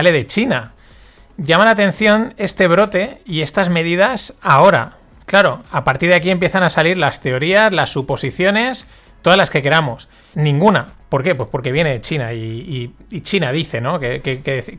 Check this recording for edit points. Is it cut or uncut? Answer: cut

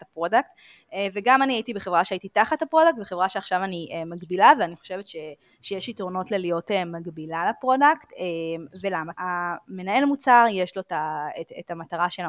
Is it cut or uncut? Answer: cut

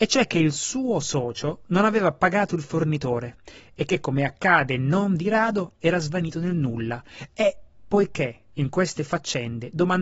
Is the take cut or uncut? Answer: uncut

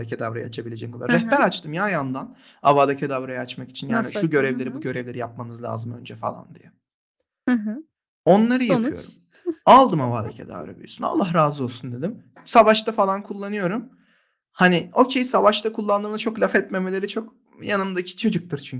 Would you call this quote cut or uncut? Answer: uncut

